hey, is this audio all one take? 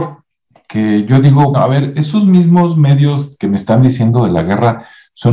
no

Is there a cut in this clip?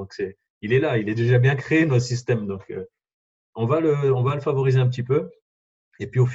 no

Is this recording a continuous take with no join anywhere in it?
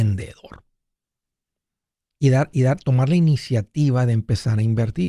yes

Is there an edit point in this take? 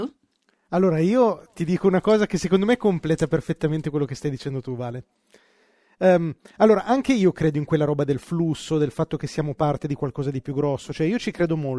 no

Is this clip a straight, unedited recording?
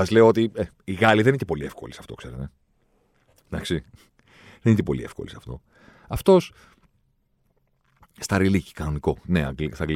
yes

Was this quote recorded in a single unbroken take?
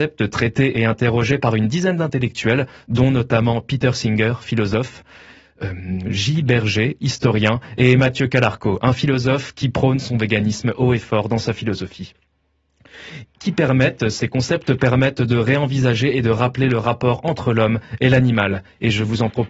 yes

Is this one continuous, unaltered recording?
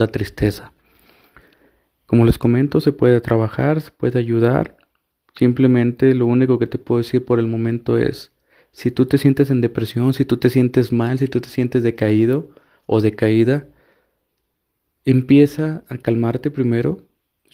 yes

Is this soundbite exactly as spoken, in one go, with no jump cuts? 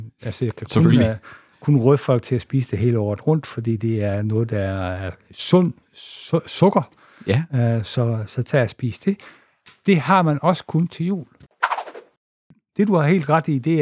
yes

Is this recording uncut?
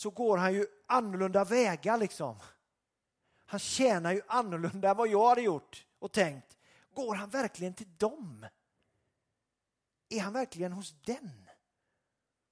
yes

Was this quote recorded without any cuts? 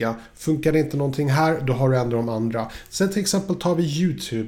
yes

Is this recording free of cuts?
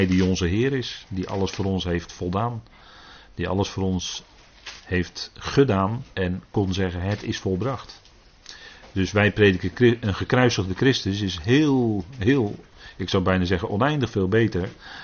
yes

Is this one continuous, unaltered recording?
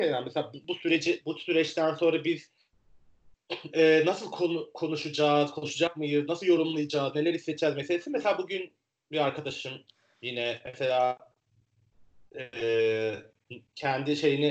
yes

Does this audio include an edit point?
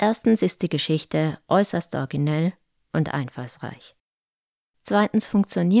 no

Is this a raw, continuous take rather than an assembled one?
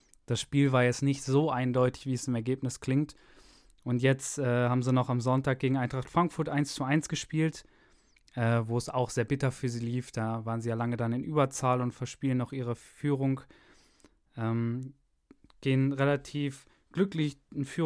yes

